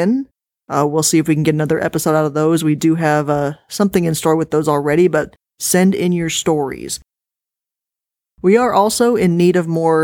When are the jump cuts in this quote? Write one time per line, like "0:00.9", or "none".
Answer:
none

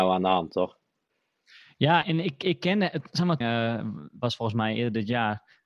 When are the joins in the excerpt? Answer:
0:02.0
0:03.4

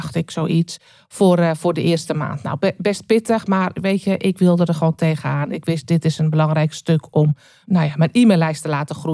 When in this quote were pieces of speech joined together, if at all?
none

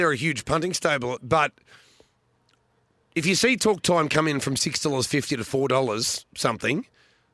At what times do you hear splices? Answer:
0:01.2

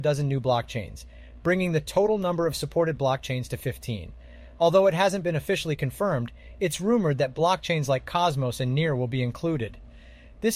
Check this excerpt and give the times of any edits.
none

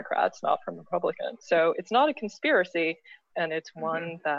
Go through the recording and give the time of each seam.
0:01.4
0:03.3

